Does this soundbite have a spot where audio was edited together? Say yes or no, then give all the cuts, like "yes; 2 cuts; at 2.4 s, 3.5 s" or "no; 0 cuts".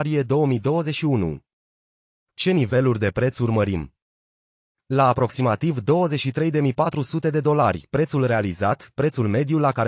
no; 0 cuts